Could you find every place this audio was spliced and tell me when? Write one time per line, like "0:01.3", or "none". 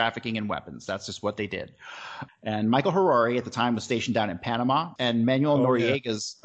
0:02.3
0:05.0

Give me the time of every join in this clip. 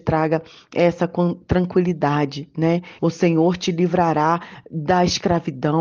0:03.0

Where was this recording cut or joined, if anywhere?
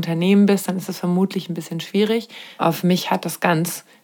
0:02.5

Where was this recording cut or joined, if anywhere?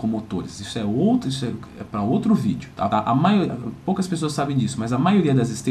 0:02.9

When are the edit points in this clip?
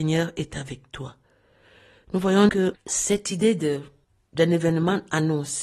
0:02.5

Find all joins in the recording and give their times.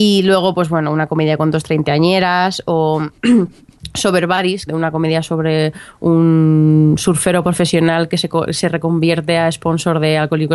0:04.7

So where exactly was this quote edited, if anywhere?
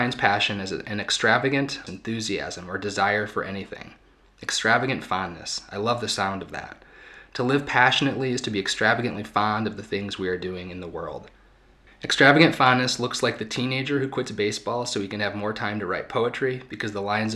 0:01.9

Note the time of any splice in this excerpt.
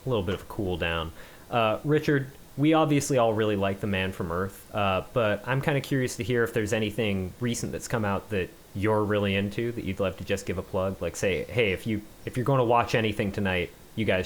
none

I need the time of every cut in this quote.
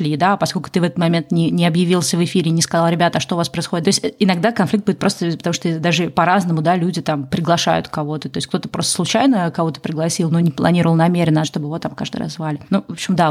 0:03.8
0:10.4
0:11.4

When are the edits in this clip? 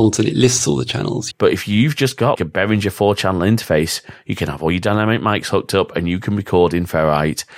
0:01.3
0:02.4

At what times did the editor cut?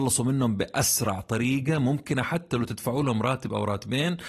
none

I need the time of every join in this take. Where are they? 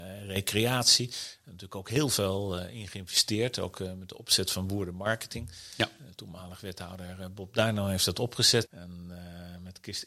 0:08.6

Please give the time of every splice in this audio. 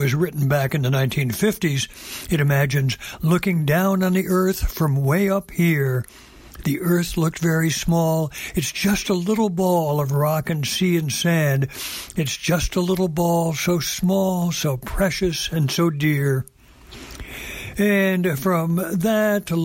none

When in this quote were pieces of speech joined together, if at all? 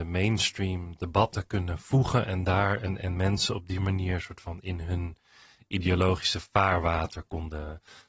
none

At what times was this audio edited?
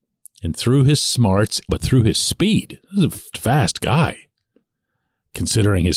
0:01.7
0:03.3

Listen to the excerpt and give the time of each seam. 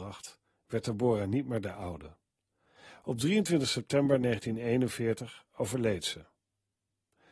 none

